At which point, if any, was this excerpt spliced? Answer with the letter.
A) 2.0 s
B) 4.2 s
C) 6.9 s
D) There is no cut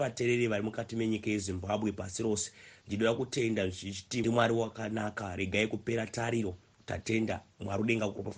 B